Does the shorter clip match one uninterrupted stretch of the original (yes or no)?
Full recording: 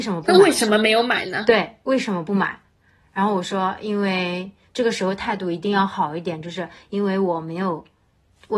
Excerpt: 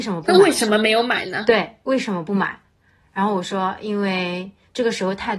yes